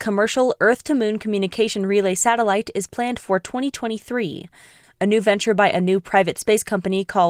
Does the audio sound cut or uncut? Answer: cut